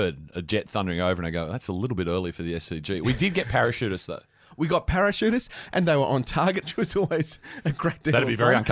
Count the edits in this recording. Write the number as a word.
one